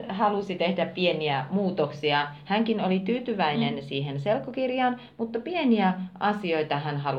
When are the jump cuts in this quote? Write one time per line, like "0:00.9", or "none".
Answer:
none

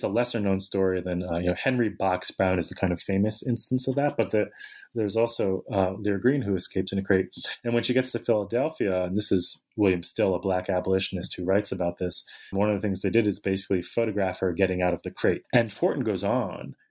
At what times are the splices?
0:12.5
0:15.4

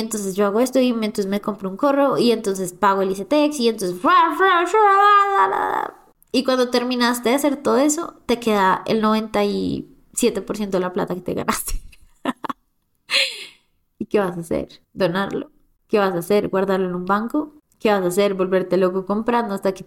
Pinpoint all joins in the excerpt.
0:14.8

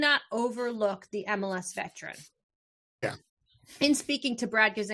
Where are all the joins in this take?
0:03.0

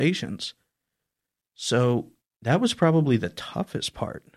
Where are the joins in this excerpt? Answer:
none

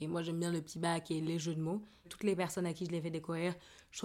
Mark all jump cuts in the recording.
0:02.0

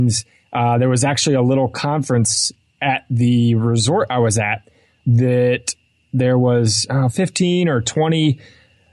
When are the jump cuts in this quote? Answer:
none

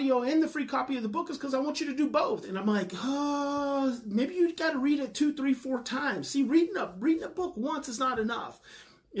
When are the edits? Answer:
0:02.4

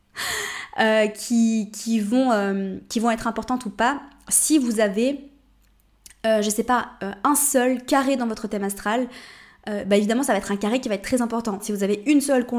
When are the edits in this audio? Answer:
0:11.6

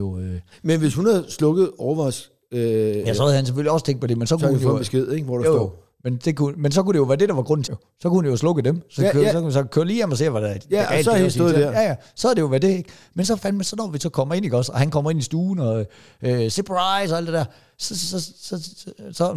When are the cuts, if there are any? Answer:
0:07.7

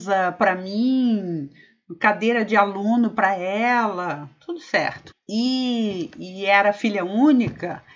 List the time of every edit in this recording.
0:05.1

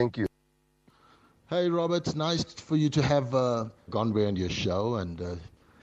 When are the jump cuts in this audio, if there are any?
0:03.9

